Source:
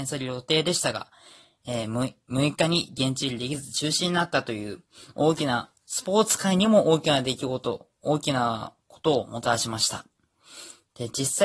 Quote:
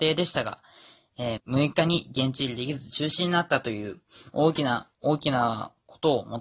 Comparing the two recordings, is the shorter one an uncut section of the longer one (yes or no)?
no